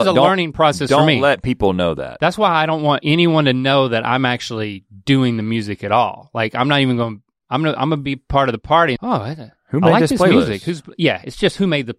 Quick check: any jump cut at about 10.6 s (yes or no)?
no